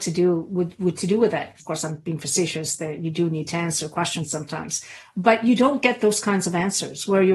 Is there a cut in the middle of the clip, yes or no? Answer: yes